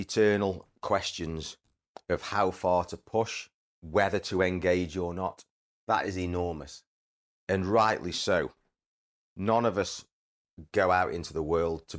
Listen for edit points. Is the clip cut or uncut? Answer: cut